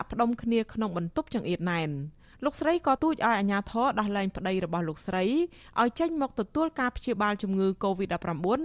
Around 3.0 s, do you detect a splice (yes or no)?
yes